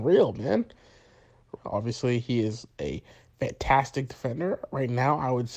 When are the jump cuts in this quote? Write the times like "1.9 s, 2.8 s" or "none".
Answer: 1.6 s